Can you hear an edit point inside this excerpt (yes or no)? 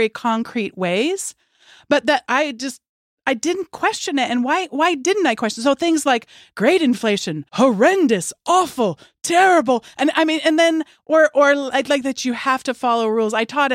yes